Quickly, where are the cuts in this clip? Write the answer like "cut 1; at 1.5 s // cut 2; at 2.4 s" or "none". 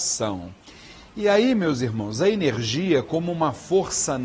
none